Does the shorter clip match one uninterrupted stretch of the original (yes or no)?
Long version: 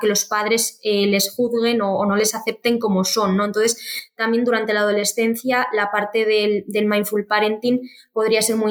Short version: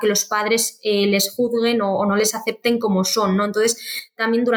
yes